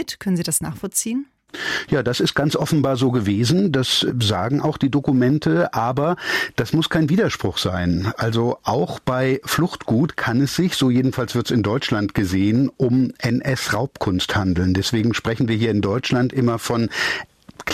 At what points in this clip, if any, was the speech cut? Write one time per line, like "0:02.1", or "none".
none

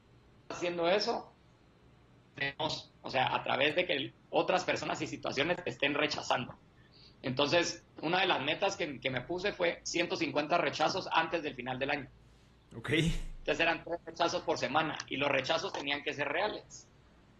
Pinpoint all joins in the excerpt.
none

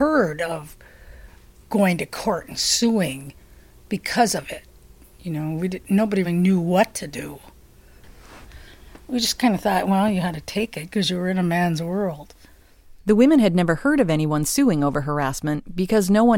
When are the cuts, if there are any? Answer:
0:06.2

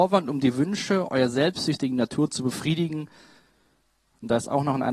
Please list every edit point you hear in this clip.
none

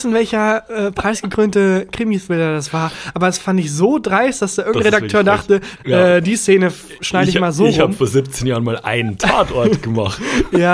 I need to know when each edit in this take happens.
0:05.8

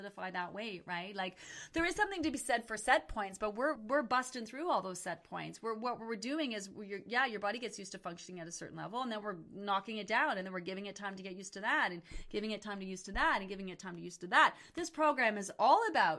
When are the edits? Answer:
0:03.8

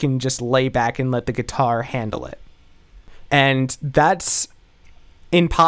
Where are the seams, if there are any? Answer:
0:03.3

